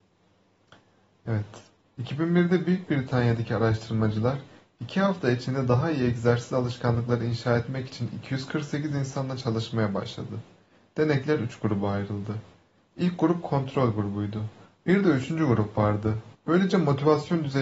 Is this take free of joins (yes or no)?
no